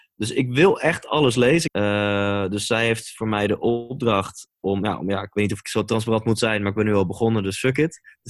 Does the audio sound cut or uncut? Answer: cut